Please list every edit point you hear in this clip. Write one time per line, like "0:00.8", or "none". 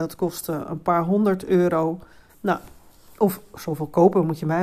0:02.3